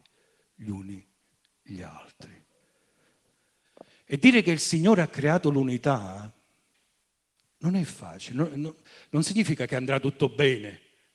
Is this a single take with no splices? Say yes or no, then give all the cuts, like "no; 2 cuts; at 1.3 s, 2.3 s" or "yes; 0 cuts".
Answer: yes; 0 cuts